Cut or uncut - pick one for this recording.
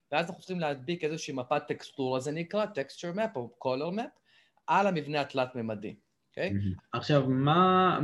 cut